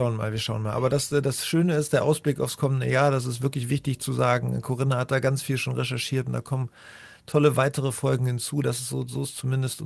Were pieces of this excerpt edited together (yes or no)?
no